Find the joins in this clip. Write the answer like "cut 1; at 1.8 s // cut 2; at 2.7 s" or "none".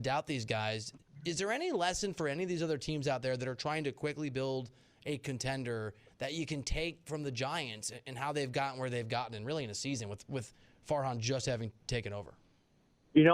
none